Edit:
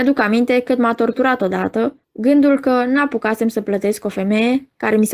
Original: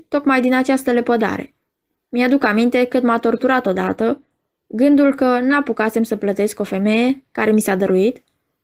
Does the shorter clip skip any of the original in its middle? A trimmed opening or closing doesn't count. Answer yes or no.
yes